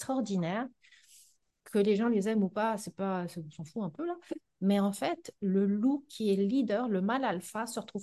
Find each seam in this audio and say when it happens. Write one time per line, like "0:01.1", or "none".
none